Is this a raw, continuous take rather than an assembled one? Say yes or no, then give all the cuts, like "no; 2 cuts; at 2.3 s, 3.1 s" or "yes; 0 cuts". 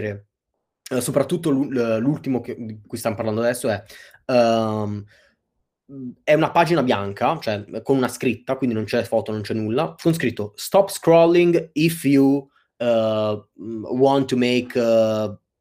yes; 0 cuts